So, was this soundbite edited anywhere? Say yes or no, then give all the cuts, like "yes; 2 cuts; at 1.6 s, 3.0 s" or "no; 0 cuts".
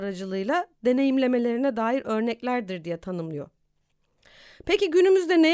no; 0 cuts